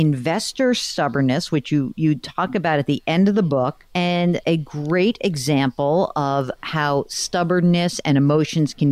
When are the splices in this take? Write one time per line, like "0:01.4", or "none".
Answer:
0:03.9